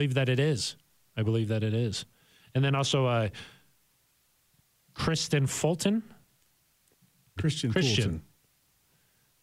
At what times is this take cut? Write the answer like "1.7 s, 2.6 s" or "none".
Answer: 7.4 s